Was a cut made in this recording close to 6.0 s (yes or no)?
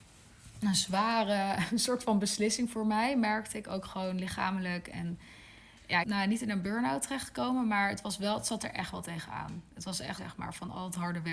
yes